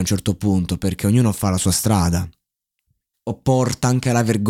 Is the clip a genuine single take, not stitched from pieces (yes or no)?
no